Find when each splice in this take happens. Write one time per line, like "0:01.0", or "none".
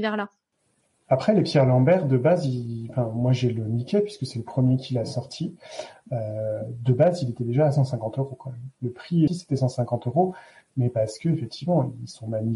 0:09.3